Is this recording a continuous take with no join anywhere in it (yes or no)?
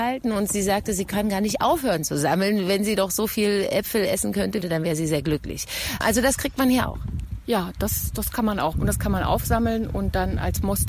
no